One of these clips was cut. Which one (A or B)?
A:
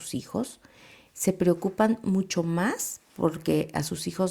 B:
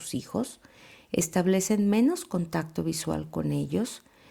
A